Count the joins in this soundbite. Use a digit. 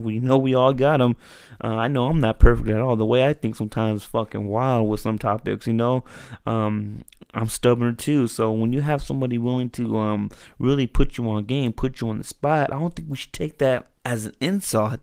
1